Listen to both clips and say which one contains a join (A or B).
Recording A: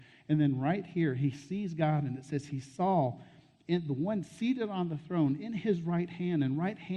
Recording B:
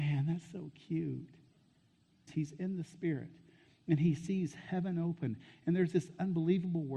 B